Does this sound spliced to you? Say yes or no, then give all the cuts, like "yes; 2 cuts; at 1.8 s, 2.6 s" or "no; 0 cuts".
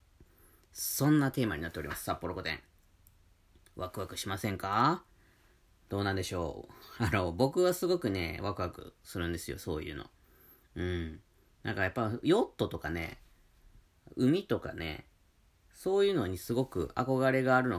no; 0 cuts